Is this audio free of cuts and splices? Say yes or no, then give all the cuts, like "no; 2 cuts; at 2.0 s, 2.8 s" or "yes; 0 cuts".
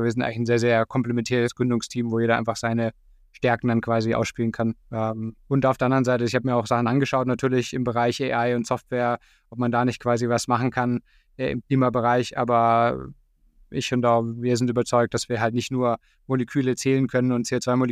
no; 1 cut; at 4.8 s